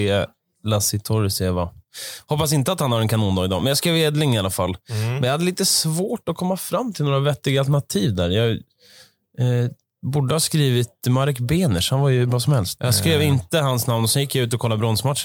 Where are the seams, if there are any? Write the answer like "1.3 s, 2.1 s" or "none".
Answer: 12.8 s